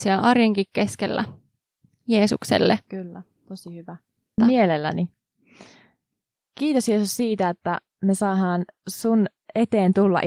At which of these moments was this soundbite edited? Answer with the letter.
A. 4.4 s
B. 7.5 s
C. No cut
A